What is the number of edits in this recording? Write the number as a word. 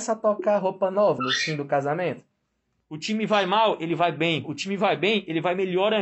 two